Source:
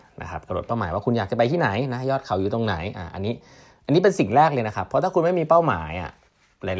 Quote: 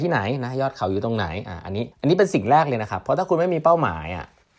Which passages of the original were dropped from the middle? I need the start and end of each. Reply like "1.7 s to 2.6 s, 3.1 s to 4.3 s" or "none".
3.4 s to 3.8 s